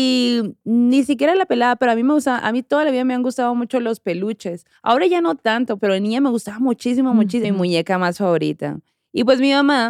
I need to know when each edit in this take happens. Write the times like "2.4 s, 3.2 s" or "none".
5.8 s, 7.4 s